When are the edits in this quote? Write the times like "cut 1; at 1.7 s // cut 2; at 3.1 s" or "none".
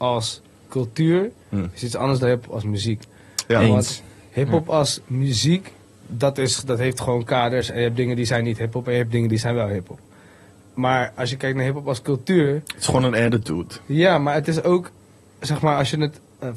none